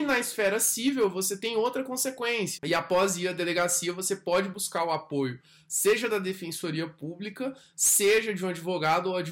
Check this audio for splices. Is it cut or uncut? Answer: cut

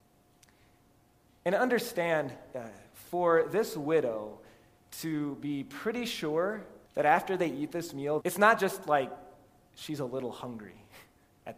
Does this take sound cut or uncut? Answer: cut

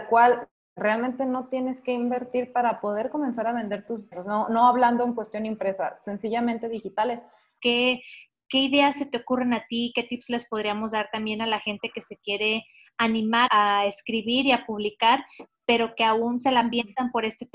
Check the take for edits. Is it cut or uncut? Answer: cut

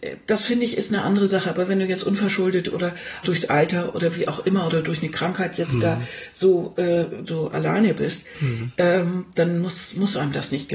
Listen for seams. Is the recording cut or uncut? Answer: cut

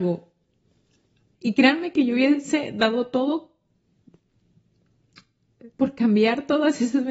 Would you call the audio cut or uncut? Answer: cut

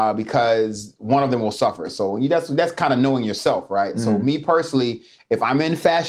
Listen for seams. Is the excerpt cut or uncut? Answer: uncut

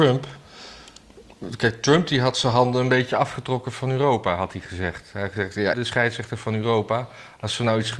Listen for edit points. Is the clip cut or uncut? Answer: cut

